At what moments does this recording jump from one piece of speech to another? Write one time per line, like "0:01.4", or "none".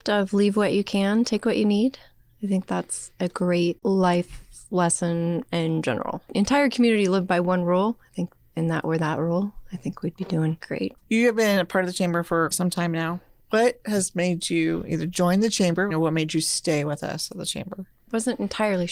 0:12.5
0:15.9